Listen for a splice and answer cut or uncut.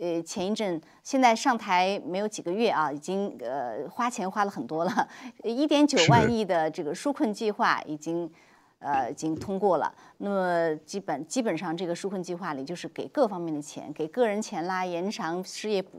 uncut